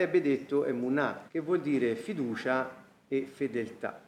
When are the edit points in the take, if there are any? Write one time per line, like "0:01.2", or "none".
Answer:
0:01.3